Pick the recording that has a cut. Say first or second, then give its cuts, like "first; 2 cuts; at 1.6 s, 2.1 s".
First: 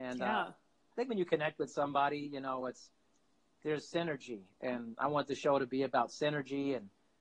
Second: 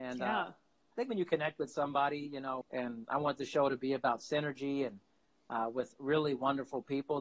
second; 1 cut; at 2.6 s